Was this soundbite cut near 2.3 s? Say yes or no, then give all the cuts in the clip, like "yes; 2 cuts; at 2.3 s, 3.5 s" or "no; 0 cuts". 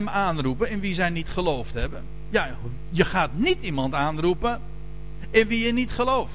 no; 0 cuts